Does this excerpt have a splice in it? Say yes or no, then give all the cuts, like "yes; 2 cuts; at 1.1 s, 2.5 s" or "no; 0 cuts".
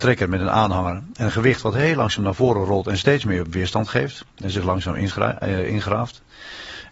no; 0 cuts